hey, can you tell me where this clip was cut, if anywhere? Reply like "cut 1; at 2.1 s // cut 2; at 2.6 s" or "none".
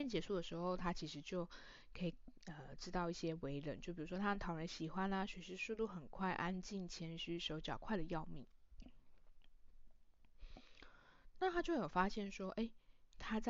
none